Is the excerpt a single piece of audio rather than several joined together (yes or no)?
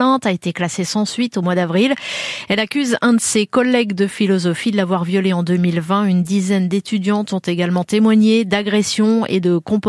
yes